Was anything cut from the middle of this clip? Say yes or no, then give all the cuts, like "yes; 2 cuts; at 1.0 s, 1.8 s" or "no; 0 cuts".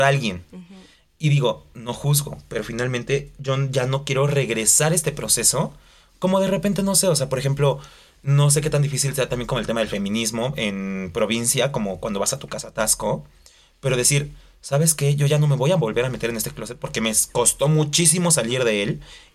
no; 0 cuts